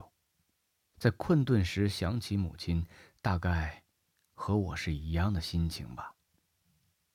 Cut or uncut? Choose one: cut